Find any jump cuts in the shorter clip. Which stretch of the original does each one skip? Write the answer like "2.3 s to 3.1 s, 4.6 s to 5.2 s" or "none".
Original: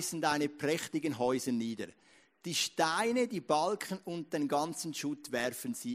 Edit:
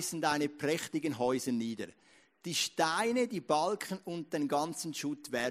none